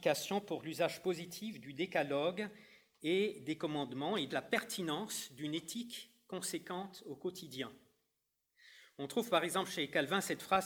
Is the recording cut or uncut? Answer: cut